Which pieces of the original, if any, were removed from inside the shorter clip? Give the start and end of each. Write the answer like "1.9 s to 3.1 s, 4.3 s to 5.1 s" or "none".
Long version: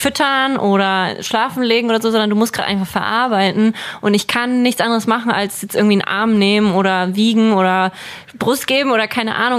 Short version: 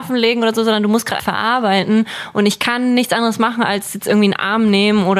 2.7 s to 2.9 s